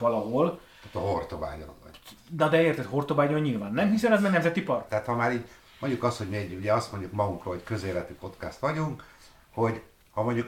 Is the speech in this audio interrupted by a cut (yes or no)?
yes